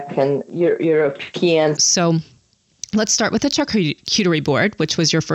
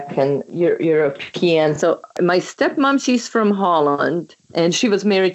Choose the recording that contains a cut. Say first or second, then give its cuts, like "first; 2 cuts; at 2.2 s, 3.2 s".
first; 1 cut; at 1.8 s